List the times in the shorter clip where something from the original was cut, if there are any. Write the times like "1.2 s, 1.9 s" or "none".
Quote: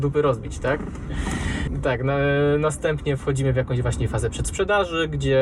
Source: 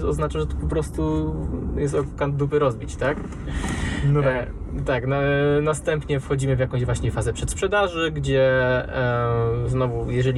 1.7 s